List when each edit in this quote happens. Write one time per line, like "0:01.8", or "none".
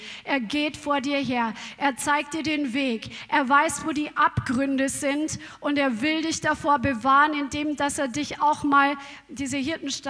none